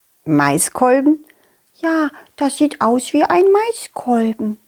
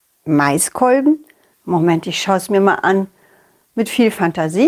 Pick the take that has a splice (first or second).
second